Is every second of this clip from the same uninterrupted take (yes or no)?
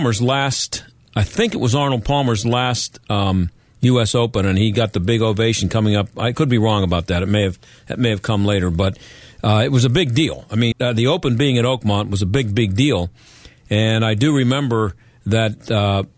no